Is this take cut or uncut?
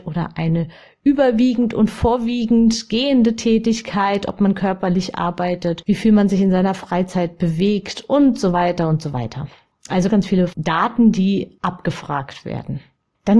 cut